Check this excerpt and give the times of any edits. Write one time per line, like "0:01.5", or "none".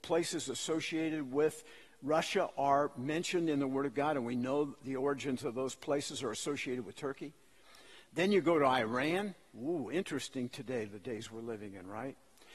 none